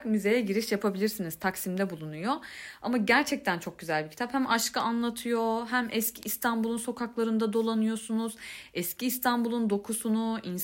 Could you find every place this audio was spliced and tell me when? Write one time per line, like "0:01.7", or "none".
none